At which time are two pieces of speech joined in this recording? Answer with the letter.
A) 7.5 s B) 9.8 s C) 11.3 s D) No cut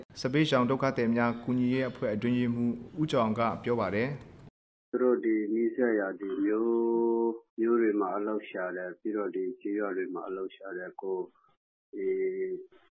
A